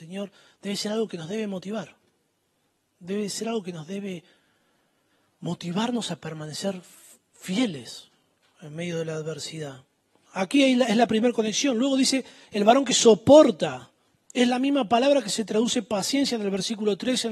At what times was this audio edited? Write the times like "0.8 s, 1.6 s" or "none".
10.3 s